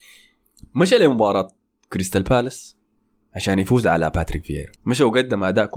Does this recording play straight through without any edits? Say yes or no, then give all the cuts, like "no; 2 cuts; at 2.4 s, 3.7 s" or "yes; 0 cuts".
no; 1 cut; at 4.8 s